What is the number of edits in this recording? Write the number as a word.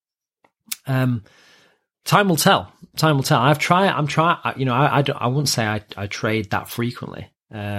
zero